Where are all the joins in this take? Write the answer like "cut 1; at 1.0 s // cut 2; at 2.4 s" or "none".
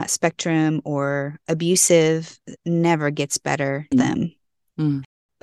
cut 1; at 2.6 s // cut 2; at 3.9 s